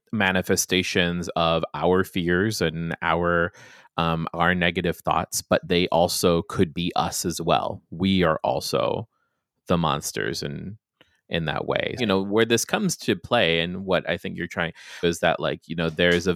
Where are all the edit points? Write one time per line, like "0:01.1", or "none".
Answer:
0:12.0
0:15.0